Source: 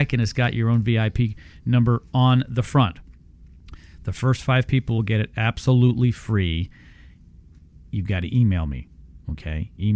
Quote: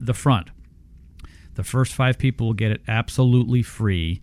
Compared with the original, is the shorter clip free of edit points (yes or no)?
yes